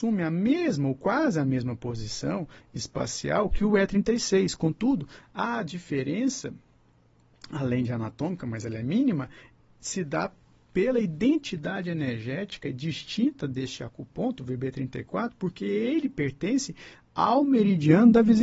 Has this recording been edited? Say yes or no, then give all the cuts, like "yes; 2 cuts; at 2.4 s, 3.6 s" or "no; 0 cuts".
no; 0 cuts